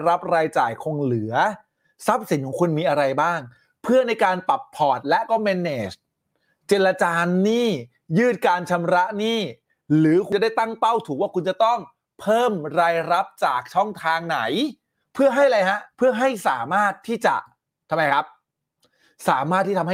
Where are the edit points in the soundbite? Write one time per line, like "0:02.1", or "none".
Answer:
0:15.9